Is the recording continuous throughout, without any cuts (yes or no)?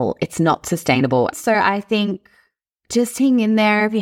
no